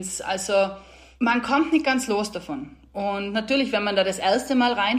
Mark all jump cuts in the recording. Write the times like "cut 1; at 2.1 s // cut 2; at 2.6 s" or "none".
none